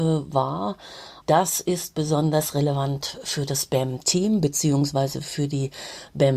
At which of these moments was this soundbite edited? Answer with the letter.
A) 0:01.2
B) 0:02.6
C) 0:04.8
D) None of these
A